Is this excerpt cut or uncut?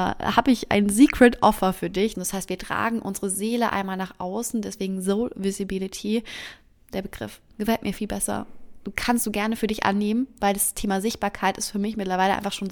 cut